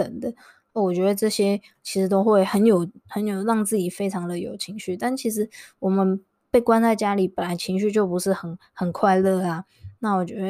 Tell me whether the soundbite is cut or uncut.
uncut